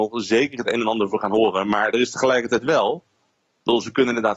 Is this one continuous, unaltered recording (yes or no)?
yes